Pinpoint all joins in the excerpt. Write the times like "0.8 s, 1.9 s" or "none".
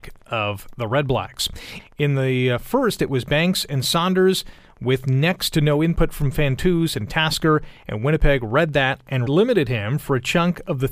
1.8 s, 9.3 s